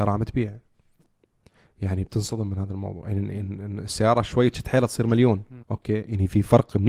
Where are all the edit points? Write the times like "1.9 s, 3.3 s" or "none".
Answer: 5.6 s